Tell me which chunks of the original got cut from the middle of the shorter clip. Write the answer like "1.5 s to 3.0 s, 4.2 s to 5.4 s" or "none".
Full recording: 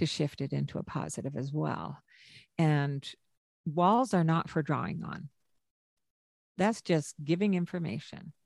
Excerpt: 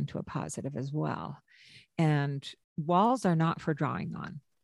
3.2 s to 3.5 s